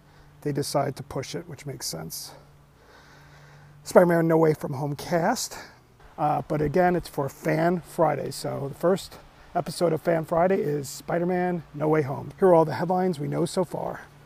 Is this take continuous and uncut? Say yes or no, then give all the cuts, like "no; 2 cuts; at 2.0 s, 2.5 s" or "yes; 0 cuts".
no; 2 cuts; at 6.0 s, 12.3 s